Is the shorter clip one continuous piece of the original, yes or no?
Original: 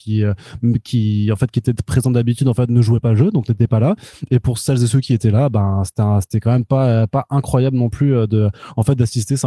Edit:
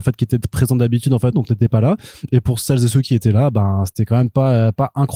no